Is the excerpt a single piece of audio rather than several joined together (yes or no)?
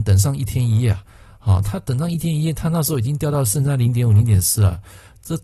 yes